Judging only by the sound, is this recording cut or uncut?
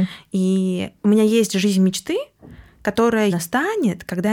cut